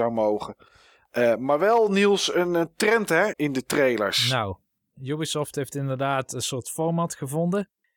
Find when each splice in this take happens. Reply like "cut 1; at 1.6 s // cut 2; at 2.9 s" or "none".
cut 1; at 3.3 s